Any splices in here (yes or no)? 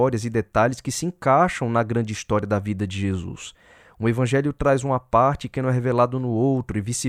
no